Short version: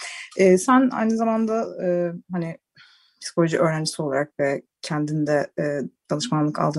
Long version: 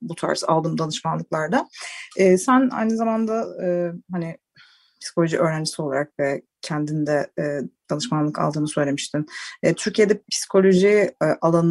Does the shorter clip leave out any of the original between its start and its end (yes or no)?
no